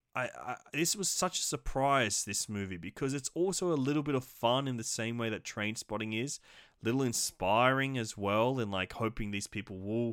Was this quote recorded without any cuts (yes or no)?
yes